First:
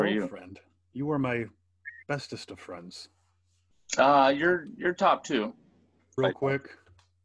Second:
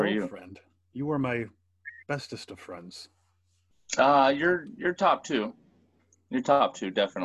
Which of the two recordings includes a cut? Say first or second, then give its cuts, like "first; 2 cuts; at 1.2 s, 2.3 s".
first; 1 cut; at 6.2 s